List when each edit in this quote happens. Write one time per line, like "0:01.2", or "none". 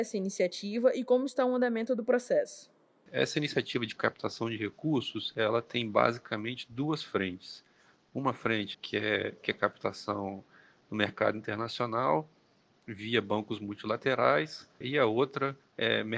0:08.7
0:14.8